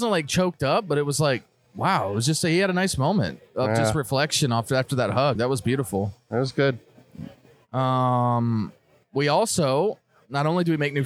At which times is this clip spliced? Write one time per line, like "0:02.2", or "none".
none